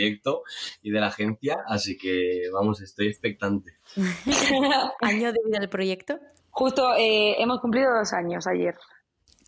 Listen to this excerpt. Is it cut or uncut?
cut